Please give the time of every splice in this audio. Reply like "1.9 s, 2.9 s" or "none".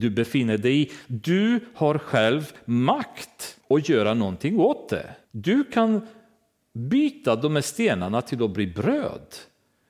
3.6 s, 5.2 s